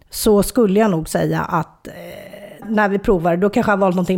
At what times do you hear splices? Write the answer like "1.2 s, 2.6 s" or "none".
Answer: 2.6 s